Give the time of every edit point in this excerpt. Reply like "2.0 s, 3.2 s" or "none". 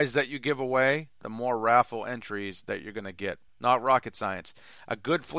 3.5 s